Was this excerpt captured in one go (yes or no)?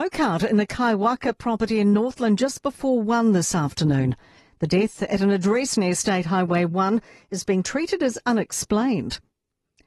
yes